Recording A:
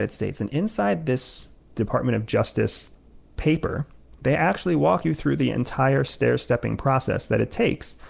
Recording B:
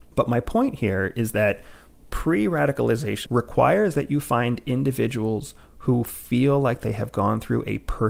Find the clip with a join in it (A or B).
B